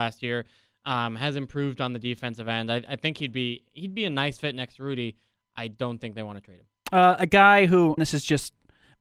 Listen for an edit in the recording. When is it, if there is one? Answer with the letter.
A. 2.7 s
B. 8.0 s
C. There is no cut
B